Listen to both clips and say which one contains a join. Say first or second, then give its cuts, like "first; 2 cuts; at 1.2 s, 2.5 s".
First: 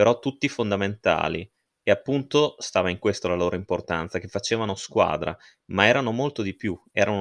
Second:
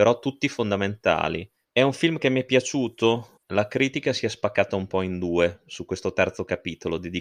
second; 2 cuts; at 1.6 s, 3.4 s